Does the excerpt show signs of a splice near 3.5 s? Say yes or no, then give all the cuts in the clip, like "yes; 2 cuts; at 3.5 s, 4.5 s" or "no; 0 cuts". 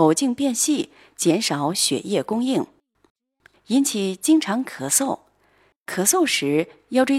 yes; 1 cut; at 3.5 s